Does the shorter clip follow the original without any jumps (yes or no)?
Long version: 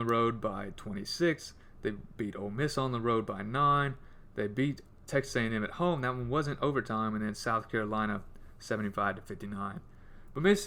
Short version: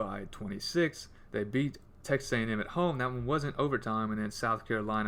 no